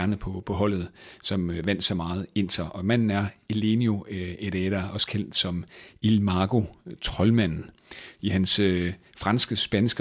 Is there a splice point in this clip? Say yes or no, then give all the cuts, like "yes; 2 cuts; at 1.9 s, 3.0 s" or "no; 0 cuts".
yes; 1 cut; at 8.1 s